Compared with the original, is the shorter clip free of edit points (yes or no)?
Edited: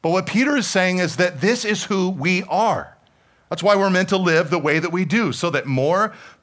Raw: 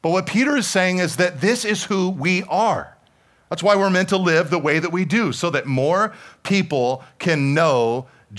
yes